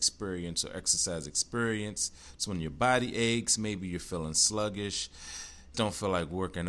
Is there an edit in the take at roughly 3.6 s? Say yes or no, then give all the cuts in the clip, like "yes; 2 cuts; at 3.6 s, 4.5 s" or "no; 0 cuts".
no; 1 cut; at 5.7 s